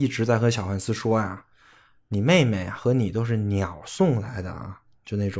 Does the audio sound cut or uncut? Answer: uncut